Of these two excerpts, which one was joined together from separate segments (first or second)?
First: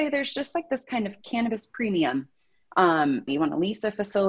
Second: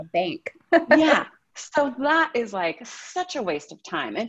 first